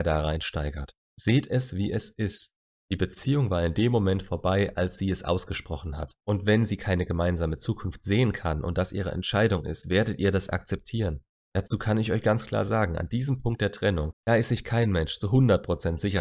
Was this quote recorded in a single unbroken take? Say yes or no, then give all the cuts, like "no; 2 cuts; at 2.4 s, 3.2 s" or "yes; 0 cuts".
no; 2 cuts; at 6.2 s, 14.1 s